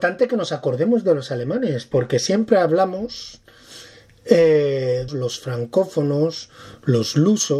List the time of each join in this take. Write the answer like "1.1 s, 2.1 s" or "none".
5.1 s